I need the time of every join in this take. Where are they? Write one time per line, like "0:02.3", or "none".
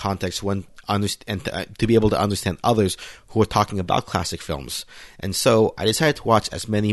none